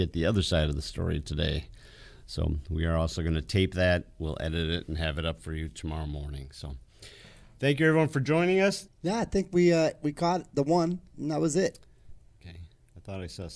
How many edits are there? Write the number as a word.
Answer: one